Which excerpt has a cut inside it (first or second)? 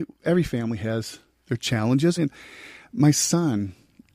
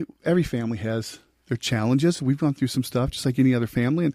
first